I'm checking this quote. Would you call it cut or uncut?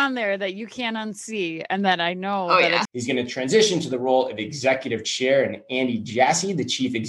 cut